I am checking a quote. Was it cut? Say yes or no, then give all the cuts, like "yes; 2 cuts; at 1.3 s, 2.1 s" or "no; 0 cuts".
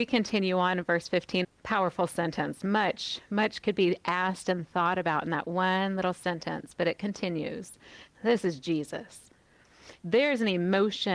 yes; 3 cuts; at 1.4 s, 8.1 s, 10.0 s